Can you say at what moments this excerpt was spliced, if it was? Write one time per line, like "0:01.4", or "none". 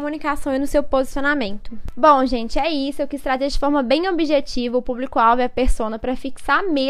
none